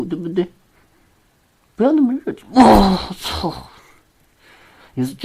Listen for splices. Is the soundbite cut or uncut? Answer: uncut